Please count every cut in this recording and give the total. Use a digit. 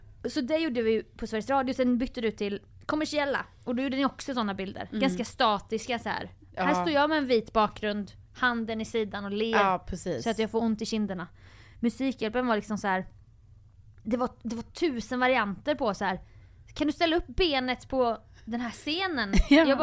0